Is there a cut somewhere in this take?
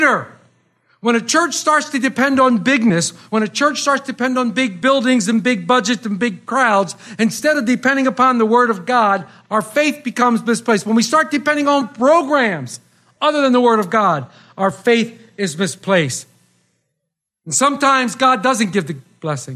no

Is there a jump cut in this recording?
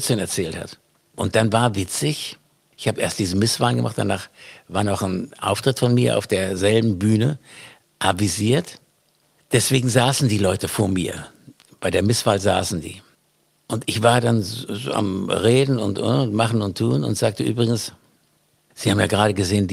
no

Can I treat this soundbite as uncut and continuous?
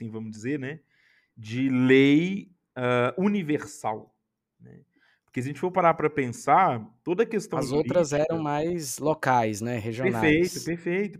yes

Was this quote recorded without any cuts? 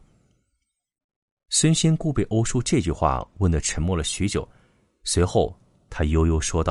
yes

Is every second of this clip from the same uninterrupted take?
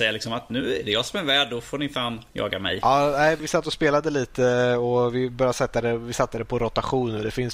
no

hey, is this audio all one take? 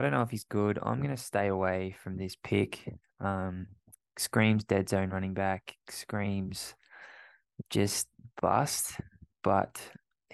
yes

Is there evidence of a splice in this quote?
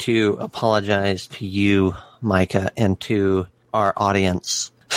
no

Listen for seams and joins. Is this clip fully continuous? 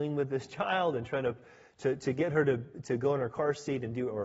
yes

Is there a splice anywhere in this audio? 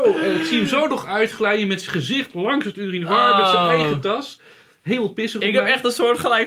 no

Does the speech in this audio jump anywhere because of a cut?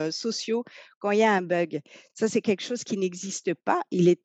no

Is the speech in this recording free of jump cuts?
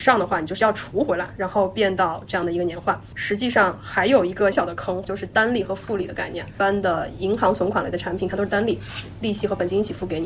no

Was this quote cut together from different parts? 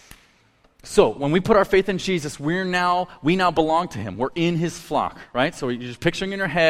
no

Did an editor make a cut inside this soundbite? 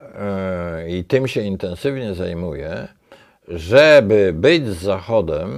no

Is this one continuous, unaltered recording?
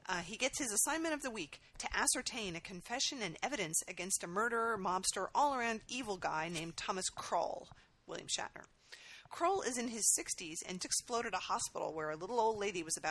no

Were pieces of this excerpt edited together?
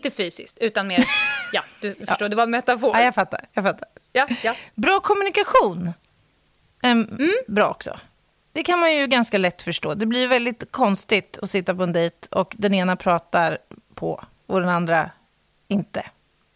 no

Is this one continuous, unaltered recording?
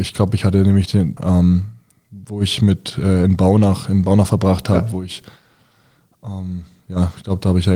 no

